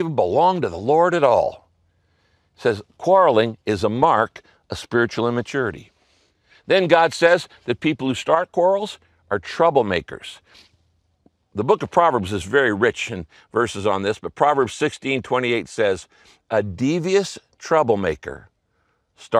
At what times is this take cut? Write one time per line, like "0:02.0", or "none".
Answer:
none